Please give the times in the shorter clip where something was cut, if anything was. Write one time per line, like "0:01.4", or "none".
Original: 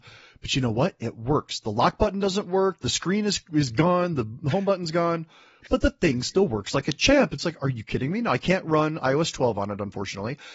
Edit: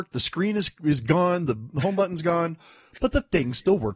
none